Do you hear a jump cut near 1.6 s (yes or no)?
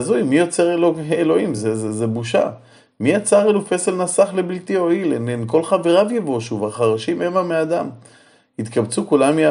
no